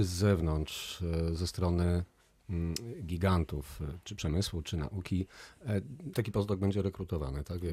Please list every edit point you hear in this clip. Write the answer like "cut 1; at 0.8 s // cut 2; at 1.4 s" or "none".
cut 1; at 6.1 s